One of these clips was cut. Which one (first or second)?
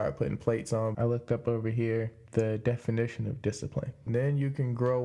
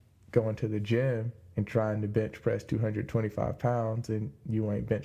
first